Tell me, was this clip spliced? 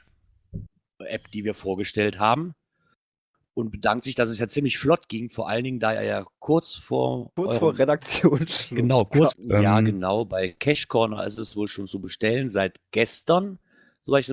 yes; 1 cut; at 9.3 s

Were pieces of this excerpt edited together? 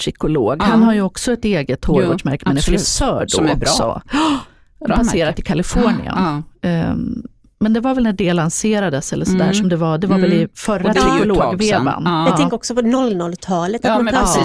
no; 0 cuts

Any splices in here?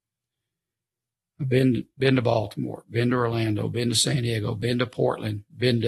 no; 0 cuts

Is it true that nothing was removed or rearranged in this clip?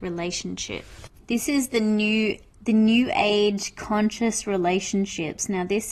yes; 0 cuts

